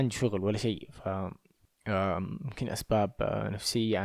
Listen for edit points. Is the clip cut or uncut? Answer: uncut